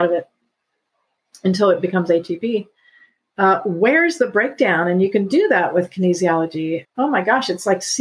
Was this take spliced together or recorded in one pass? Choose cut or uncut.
cut